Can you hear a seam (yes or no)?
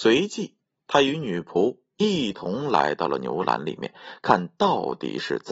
no